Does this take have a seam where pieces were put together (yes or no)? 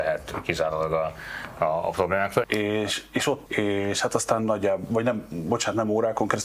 yes